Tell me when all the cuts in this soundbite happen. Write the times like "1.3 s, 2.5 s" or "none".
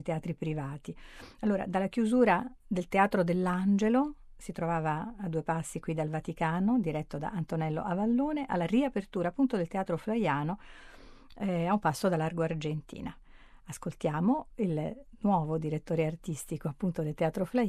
none